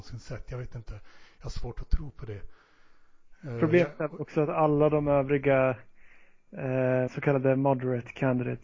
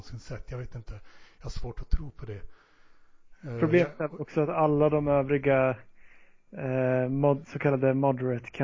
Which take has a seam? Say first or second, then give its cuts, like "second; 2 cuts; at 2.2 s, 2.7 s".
first; 1 cut; at 7.1 s